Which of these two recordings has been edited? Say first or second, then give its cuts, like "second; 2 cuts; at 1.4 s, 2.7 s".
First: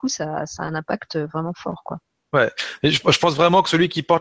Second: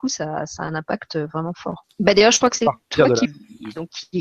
second; 2 cuts; at 1.8 s, 3.3 s